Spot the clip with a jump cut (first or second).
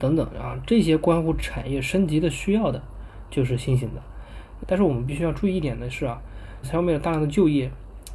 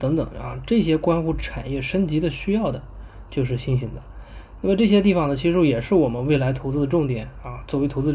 first